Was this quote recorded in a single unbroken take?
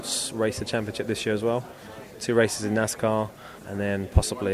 no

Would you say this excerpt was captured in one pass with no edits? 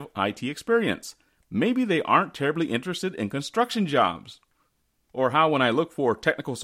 yes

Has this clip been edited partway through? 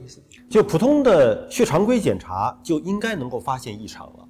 no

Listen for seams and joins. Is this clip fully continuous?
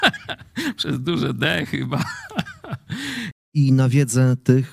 no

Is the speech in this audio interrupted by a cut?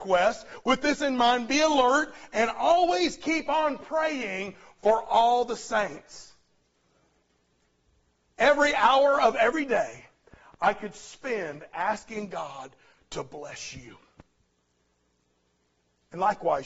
no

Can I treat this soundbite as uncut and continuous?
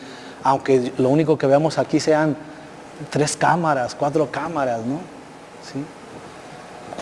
yes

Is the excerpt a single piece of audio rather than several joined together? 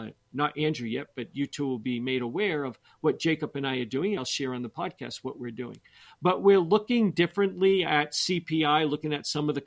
no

